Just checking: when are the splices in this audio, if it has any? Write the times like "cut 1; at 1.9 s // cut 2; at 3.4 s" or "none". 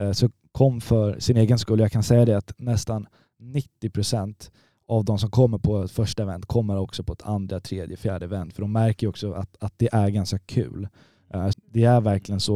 cut 1; at 11.5 s